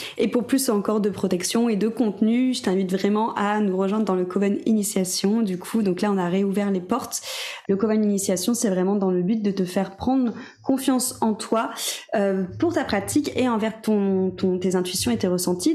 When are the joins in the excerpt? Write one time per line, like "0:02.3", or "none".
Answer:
0:07.6